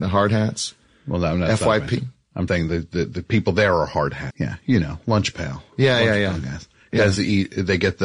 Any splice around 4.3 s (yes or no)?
yes